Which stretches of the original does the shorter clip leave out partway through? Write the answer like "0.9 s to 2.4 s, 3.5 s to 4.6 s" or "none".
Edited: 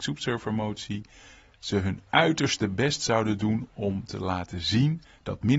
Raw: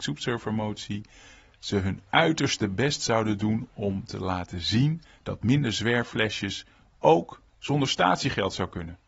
none

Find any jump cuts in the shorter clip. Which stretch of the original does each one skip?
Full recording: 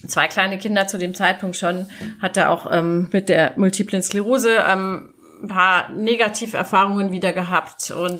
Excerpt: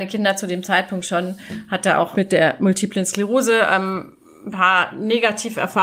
2.6 s to 3.1 s

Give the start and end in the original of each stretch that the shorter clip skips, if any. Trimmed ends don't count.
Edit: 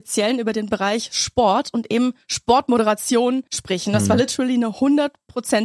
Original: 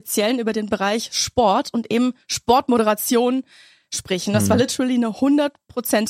3.5 s to 3.9 s

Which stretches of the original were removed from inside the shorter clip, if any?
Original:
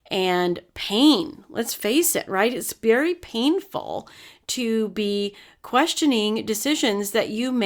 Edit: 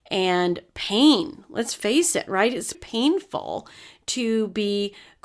2.7 s to 3.2 s

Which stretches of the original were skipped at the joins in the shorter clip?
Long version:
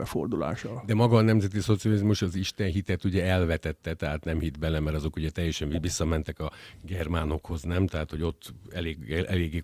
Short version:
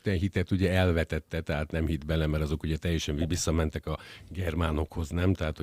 none

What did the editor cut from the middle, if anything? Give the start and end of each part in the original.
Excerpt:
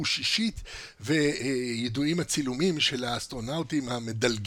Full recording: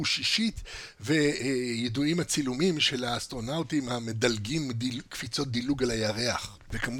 none

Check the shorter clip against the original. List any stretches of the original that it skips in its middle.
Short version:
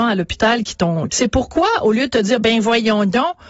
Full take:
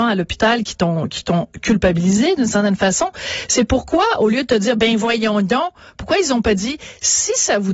1.1 s to 3.5 s

